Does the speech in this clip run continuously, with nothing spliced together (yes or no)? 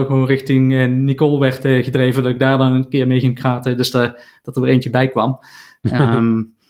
yes